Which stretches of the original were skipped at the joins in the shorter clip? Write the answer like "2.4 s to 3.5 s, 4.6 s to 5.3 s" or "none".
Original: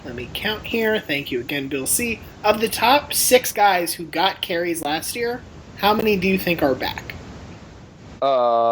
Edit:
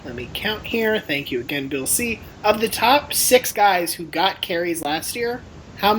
none